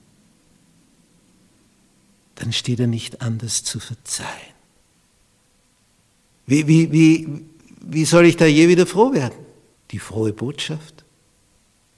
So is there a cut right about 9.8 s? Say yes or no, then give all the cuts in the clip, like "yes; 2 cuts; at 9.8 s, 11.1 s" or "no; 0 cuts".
yes; 2 cuts; at 6.3 s, 9.8 s